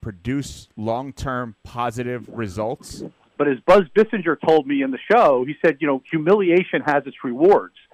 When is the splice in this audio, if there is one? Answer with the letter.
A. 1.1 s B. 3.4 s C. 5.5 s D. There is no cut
B